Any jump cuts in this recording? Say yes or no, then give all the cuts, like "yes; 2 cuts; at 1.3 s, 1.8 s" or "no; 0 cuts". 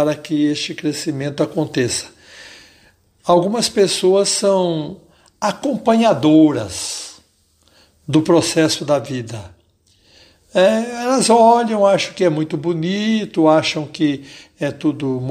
no; 0 cuts